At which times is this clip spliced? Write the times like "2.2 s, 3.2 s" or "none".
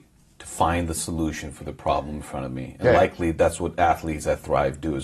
none